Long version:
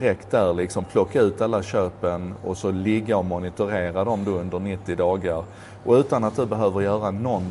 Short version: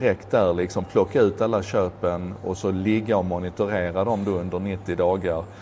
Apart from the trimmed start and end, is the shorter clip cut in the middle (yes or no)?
no